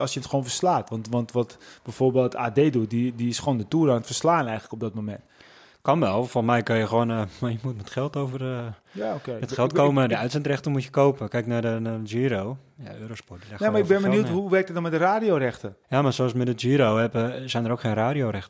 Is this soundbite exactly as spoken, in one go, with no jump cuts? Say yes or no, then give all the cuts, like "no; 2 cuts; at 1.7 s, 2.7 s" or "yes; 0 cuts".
no; 1 cut; at 15.8 s